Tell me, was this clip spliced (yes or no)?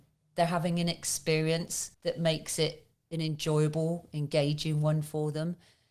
yes